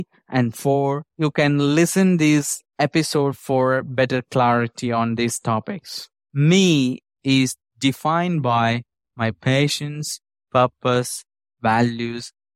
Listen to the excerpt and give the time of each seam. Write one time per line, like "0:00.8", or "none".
0:06.3